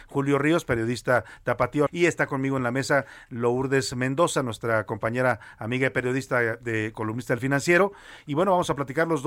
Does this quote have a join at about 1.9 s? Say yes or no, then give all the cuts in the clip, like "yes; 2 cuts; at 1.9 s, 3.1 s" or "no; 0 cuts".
yes; 1 cut; at 1.9 s